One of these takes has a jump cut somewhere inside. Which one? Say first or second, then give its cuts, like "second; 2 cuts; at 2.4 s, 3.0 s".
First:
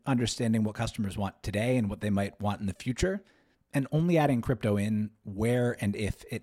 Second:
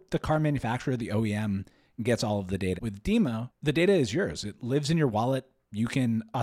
second; 1 cut; at 2.8 s